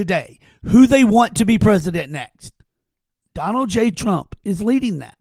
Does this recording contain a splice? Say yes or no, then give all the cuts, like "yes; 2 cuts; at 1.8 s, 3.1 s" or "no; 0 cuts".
no; 0 cuts